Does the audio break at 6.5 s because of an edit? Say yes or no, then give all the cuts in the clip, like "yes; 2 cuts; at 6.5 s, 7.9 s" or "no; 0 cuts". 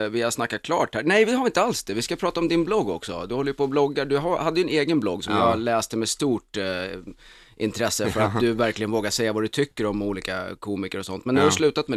no; 0 cuts